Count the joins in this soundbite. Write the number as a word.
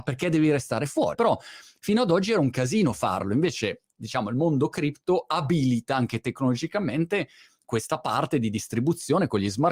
one